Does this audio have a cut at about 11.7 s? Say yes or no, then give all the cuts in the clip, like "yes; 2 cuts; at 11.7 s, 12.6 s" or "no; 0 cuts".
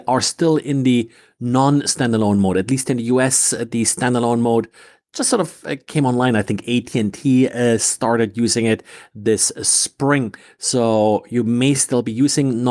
no; 0 cuts